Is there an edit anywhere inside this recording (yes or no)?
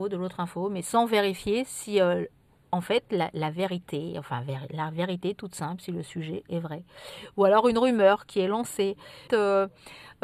yes